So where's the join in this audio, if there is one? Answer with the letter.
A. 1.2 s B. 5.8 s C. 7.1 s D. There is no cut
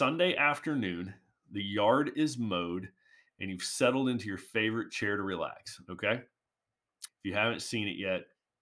C